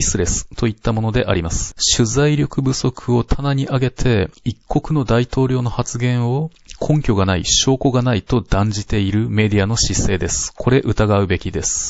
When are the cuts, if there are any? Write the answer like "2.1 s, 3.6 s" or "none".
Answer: none